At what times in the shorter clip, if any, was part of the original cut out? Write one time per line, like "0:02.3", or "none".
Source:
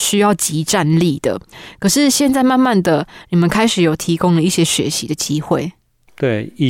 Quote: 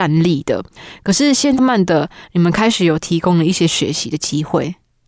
0:01.6